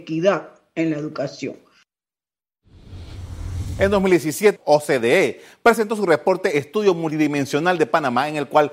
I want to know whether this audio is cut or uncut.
cut